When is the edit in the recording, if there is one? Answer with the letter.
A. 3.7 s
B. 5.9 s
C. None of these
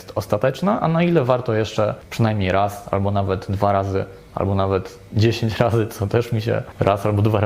C